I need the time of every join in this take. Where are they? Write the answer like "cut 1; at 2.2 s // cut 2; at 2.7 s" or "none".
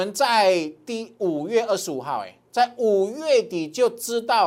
none